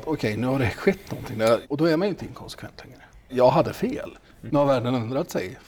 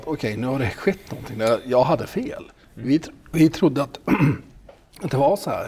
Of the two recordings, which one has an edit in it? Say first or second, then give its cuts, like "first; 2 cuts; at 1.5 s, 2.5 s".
first; 3 cuts; at 1.6 s, 3.3 s, 4.5 s